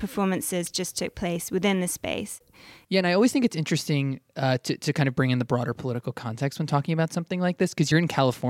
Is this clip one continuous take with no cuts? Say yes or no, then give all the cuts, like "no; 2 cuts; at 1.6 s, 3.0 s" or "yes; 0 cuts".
no; 1 cut; at 2.8 s